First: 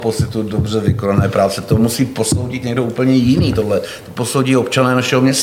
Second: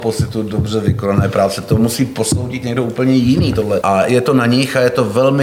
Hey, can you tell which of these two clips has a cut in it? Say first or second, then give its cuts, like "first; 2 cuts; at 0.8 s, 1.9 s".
second; 1 cut; at 3.8 s